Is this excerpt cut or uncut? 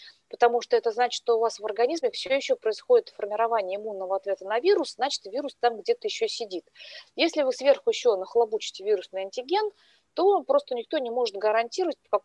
uncut